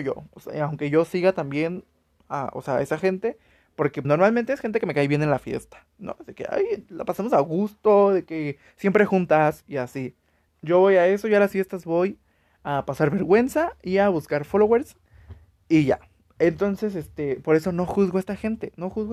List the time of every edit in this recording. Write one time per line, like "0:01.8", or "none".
0:04.0
0:10.5